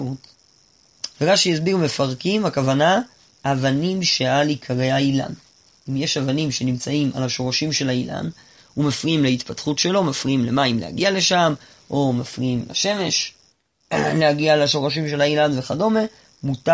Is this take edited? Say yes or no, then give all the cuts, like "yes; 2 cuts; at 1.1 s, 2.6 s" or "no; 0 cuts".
yes; 1 cut; at 1.1 s